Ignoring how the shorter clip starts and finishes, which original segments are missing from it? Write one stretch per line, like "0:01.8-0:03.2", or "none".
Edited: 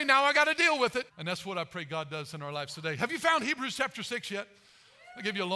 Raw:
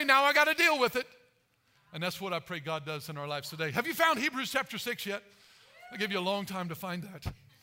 0:01.1-0:01.8